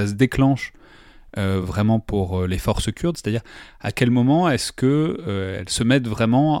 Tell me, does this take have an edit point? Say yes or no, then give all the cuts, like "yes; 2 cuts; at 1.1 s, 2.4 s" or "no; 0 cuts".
no; 0 cuts